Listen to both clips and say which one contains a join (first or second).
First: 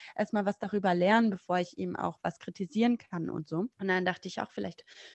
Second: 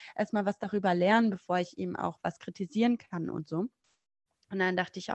first